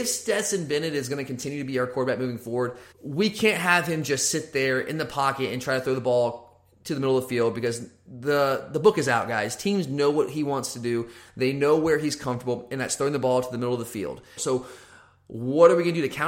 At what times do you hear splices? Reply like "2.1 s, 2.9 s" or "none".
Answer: 2.9 s, 14.4 s